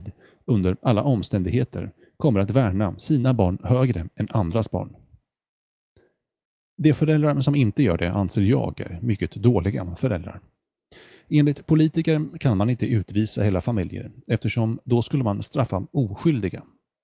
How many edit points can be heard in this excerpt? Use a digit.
0